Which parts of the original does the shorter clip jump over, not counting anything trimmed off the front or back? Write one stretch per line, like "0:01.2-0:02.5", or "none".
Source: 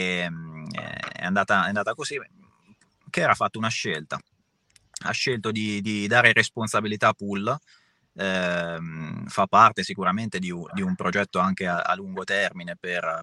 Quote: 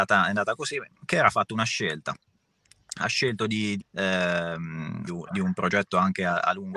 0:02.3-0:03.0
0:05.8-0:08.0
0:09.3-0:10.5

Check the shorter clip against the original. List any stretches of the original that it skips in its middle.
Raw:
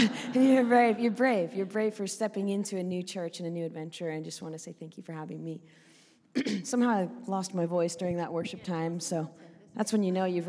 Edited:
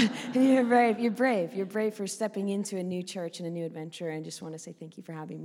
none

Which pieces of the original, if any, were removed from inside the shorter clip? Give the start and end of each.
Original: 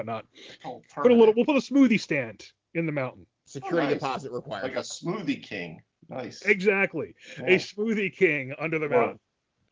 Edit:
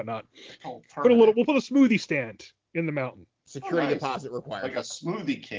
none

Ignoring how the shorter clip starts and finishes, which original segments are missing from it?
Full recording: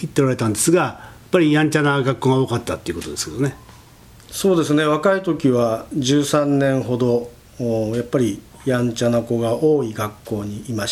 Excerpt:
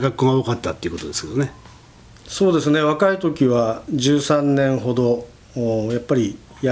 none

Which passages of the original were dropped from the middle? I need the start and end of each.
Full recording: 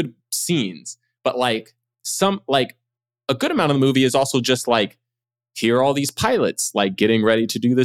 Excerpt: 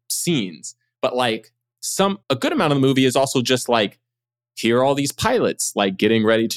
0:02.4-0:03.2

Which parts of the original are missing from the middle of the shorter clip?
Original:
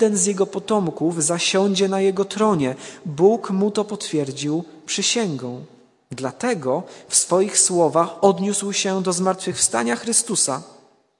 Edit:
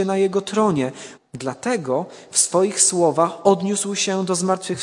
0:03.0-0:05.9

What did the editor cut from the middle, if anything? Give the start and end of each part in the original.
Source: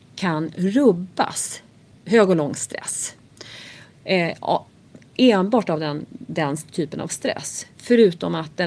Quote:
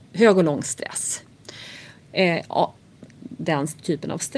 0:05.1-0:06.1

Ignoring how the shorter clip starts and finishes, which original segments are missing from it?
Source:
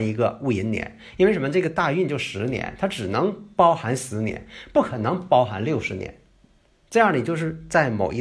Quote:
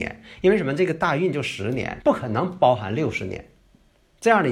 0:02.8-0:04.7

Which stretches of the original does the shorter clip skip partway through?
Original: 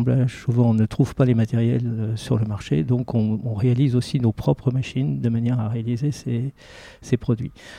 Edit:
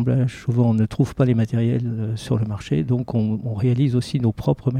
none

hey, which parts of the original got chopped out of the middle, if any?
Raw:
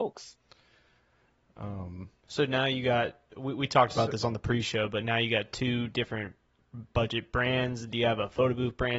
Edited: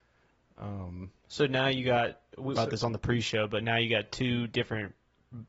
0:03.5-0:04.0

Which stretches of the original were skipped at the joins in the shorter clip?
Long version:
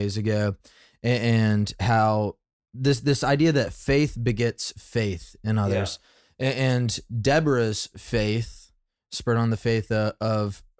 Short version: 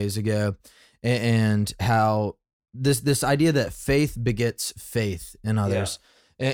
none

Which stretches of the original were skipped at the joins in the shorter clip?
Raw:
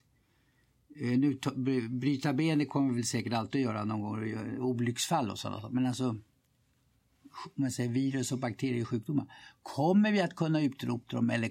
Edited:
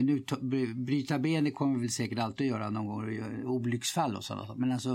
none

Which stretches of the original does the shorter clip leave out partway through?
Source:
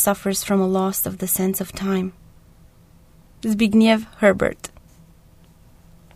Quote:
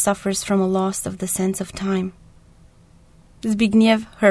none

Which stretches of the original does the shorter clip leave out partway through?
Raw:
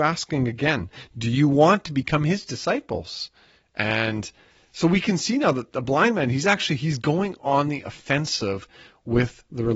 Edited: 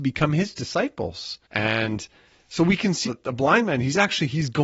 0:03.3-0:03.7
0:05.3-0:05.5

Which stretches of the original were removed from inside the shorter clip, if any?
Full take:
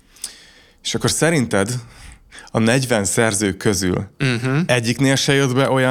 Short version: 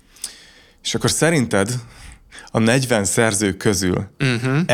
none

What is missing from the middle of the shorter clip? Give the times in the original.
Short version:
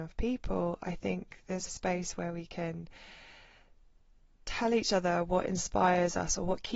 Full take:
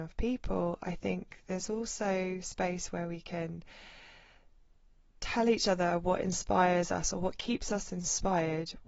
0:01.7-0:02.4

